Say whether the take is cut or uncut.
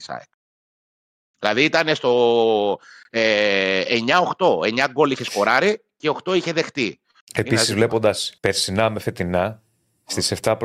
cut